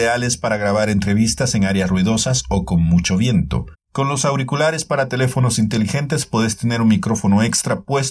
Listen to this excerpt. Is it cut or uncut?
cut